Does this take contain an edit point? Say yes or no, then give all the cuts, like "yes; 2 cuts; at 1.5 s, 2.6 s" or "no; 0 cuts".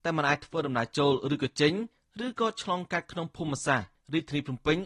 no; 0 cuts